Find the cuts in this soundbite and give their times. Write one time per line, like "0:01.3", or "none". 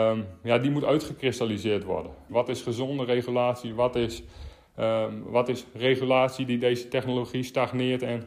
0:02.3